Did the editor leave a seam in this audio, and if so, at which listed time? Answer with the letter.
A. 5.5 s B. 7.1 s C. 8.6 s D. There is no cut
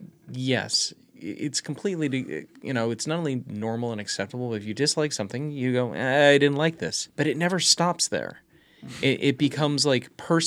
B